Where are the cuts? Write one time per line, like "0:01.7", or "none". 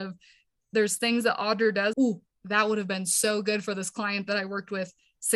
0:01.9